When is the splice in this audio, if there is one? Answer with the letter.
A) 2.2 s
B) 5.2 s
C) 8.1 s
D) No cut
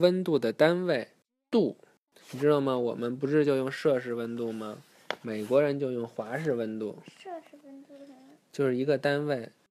A